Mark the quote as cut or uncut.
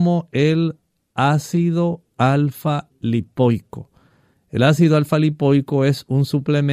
uncut